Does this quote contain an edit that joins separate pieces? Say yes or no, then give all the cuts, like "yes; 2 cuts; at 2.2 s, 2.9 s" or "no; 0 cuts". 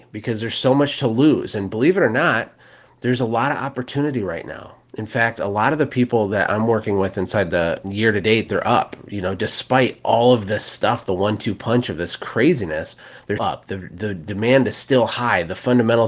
yes; 2 cuts; at 7.8 s, 13.4 s